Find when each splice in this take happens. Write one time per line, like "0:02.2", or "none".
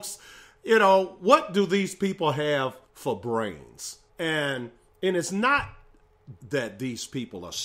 0:02.8
0:04.1
0:06.4